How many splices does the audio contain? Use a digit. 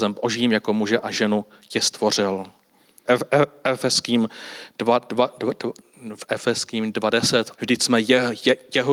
2